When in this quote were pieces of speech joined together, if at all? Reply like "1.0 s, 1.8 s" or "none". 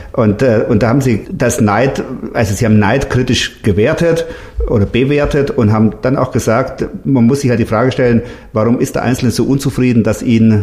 1.2 s

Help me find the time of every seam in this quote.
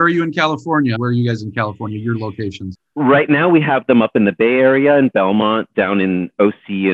0.9 s

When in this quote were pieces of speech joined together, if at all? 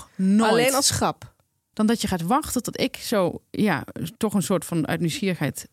1.7 s

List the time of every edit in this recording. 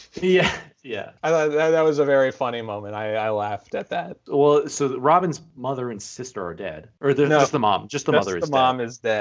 none

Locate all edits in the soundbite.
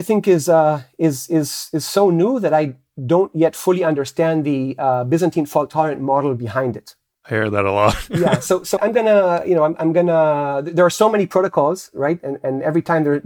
8.8 s

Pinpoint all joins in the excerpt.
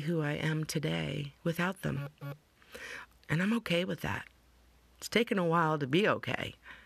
3.2 s

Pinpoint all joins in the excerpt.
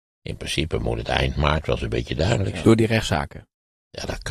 2.6 s

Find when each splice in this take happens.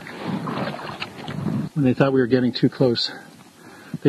1.7 s

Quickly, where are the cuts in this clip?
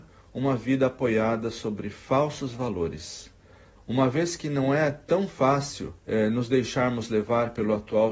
3.8 s, 6.0 s

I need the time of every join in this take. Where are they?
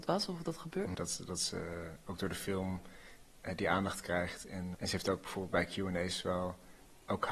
0.9 s, 4.7 s

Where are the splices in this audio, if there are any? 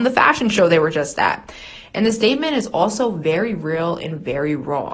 none

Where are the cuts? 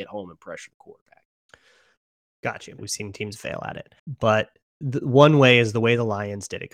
2.8 s, 4.0 s

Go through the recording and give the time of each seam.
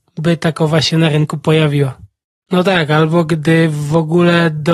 2.4 s

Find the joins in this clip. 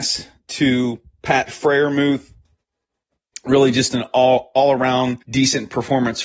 5.2 s

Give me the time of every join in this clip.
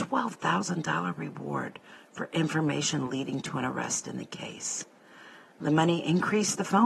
none

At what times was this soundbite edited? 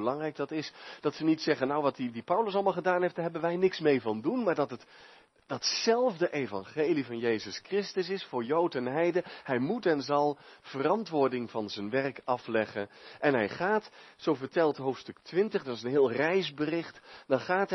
15.6 s

